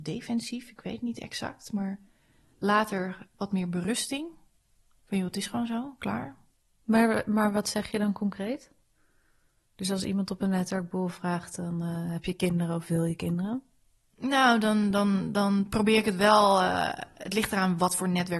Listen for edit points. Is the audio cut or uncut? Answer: uncut